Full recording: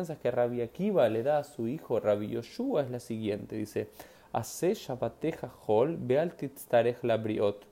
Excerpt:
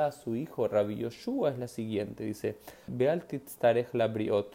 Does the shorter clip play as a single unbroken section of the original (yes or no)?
no